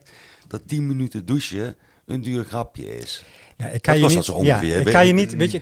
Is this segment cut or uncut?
uncut